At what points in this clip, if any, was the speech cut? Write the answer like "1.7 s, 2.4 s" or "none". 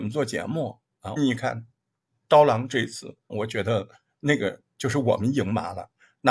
1.2 s, 3.3 s